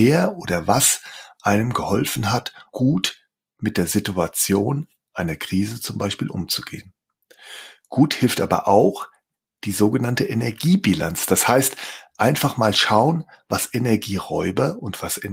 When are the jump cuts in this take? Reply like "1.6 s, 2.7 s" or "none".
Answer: 2.7 s